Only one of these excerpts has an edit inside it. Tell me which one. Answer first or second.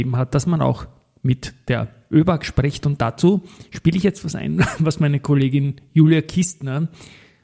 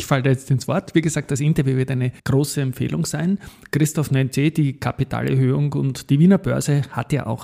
second